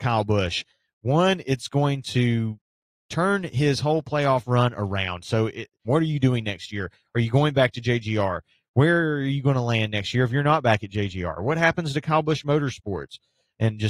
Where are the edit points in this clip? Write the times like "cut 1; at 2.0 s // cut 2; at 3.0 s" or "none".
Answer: cut 1; at 5.8 s